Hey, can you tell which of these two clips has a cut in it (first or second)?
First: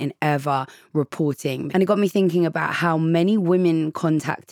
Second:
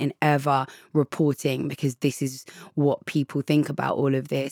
first